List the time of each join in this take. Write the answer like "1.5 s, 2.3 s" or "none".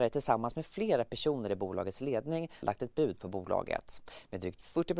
2.6 s